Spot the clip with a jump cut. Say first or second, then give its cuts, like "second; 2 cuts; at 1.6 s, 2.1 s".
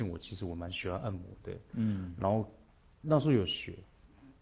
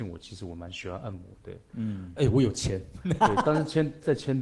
second; 1 cut; at 2.2 s